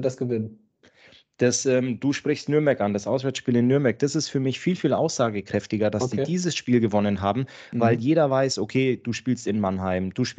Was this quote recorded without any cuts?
yes; 0 cuts

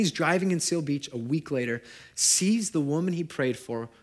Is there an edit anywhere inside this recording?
no; 0 cuts

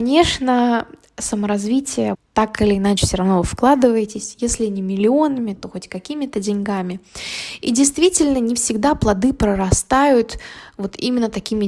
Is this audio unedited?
no; 1 cut; at 2.1 s

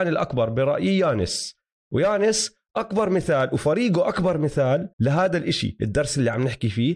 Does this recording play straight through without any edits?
no; 1 cut; at 4.9 s

